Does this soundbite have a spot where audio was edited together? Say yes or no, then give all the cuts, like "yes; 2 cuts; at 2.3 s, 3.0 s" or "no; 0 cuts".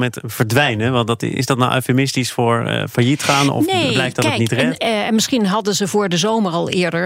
yes; 1 cut; at 4.8 s